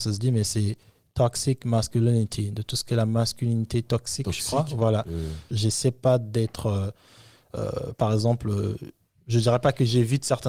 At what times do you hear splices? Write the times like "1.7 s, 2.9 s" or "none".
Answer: 5.5 s